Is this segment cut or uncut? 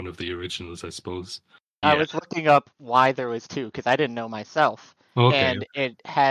cut